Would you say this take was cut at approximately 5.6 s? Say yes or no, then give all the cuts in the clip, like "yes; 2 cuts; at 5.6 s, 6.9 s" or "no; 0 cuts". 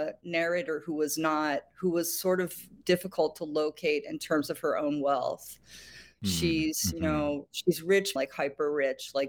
no; 1 cut; at 8.2 s